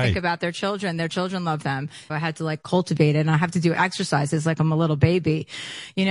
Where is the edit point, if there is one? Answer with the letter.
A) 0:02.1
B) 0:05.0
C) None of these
A